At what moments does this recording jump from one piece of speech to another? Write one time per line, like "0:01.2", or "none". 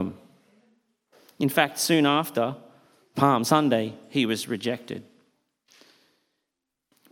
none

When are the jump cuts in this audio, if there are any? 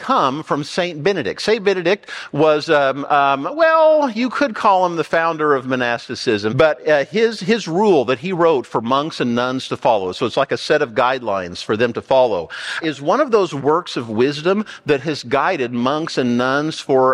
0:06.5
0:12.8

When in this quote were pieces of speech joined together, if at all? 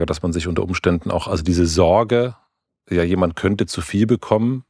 none

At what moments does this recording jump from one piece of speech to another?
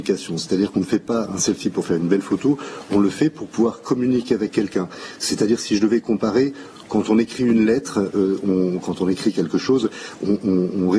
none

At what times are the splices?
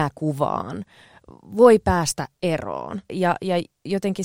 0:03.1

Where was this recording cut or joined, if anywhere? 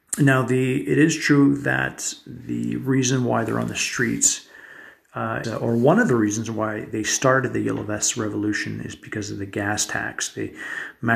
0:05.4

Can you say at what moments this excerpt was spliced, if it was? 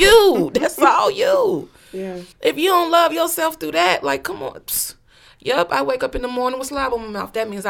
0:02.3

